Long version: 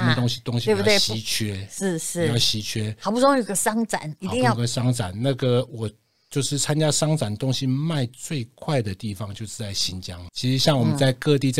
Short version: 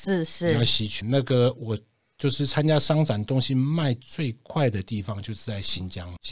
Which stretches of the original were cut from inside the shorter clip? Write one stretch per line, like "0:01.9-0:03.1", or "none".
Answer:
0:02.7-0:05.1